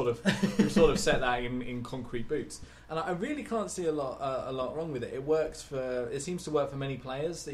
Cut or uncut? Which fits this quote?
uncut